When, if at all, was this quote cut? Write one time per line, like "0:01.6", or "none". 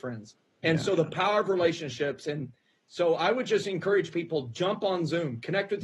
none